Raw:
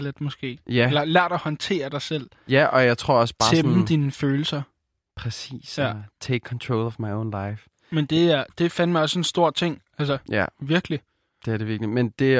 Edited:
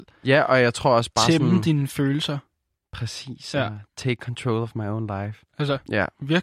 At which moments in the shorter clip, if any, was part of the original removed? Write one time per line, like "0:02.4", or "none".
0:05.5